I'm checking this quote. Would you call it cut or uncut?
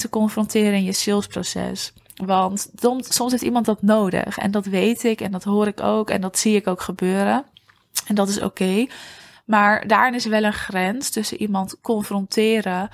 uncut